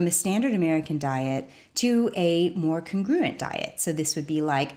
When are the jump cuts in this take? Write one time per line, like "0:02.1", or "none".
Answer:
none

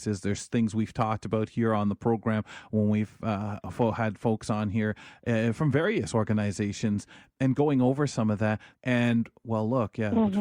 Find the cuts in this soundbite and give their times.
0:08.7

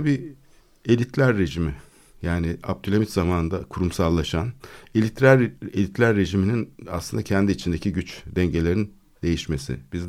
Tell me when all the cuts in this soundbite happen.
none

